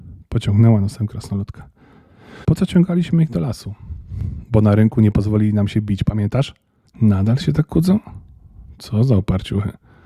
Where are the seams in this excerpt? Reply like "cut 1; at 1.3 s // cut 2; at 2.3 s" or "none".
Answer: cut 1; at 2.4 s // cut 2; at 6.9 s